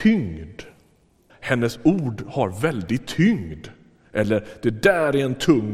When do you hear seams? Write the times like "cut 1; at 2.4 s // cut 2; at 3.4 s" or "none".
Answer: cut 1; at 1.3 s